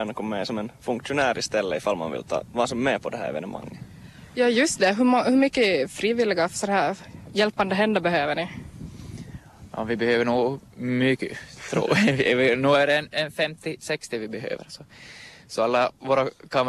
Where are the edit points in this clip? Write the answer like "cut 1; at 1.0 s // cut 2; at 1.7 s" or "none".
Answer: none